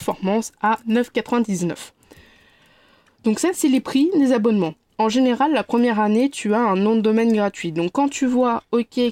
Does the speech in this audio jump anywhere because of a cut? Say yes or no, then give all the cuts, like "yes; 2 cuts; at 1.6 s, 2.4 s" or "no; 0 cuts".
no; 0 cuts